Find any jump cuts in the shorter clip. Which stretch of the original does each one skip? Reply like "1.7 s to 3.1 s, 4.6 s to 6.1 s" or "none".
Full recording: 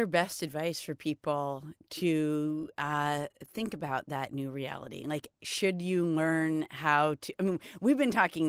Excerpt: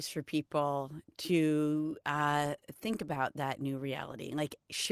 none

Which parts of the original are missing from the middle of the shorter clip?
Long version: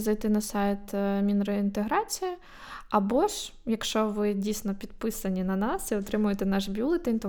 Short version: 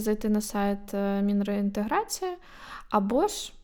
none

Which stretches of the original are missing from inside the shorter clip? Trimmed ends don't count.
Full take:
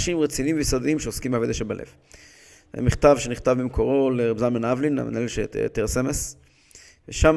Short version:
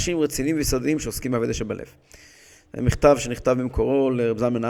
none

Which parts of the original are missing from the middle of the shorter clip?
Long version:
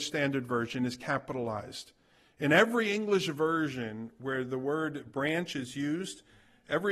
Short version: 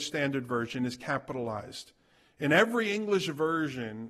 none

